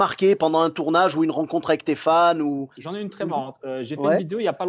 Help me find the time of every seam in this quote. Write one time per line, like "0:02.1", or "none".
none